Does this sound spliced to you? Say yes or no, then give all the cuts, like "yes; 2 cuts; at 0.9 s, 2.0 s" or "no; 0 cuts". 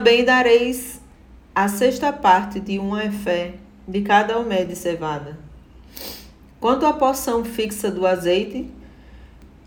no; 0 cuts